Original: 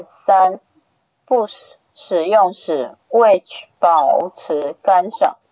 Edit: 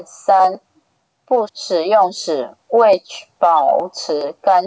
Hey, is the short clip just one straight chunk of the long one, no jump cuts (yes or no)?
no